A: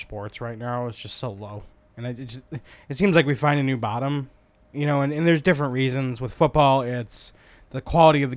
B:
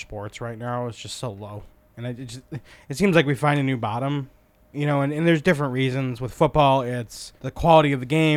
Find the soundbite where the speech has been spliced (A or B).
B